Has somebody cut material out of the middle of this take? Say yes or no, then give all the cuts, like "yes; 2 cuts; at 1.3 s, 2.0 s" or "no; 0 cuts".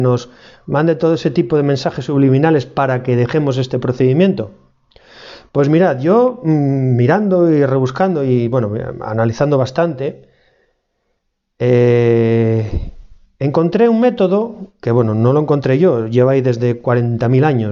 no; 0 cuts